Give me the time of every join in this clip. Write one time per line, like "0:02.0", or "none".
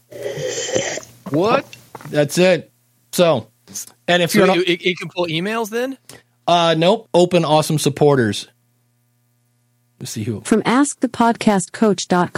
none